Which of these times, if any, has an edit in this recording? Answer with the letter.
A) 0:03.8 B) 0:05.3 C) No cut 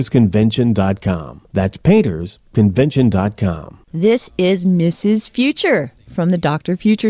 A